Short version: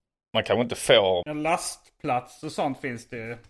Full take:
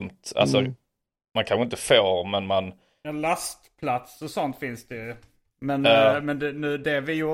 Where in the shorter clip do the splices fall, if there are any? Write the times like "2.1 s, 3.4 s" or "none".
1.2 s